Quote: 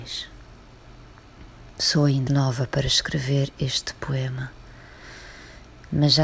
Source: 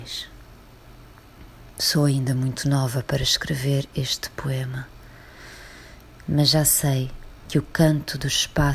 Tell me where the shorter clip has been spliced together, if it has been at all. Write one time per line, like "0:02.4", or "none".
0:02.3